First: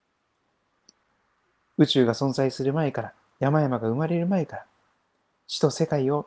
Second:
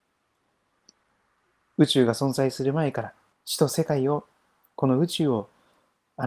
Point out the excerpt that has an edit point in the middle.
second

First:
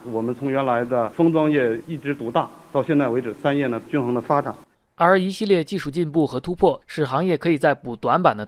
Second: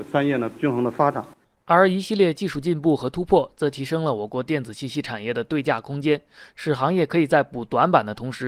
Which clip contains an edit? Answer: first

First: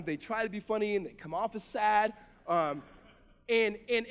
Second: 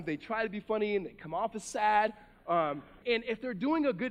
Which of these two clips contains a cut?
second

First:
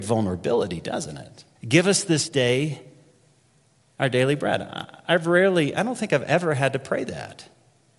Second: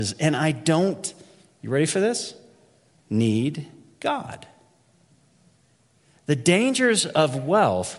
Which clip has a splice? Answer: first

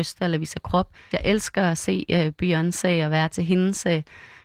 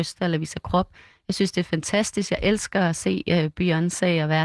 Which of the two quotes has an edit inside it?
first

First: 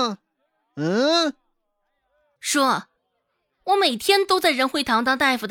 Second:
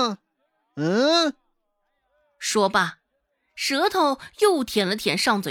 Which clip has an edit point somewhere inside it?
first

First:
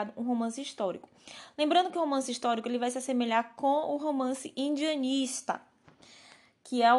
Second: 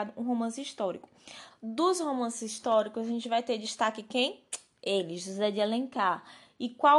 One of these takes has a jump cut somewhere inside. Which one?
second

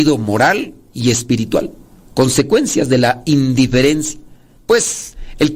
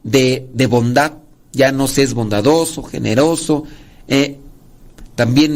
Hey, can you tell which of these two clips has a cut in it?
first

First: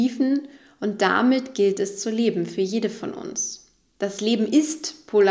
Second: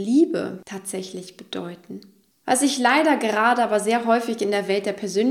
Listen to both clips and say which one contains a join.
second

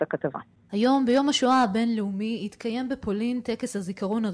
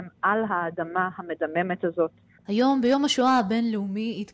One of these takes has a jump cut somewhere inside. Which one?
second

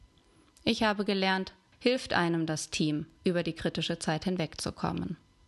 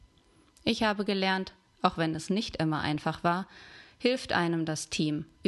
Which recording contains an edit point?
first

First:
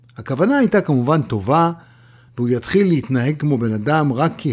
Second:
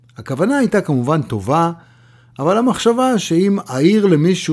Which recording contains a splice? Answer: first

